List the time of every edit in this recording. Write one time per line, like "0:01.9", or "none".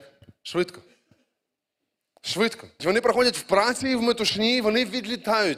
0:02.8